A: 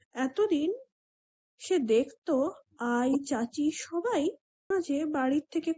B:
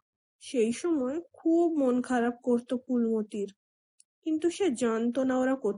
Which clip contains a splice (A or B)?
A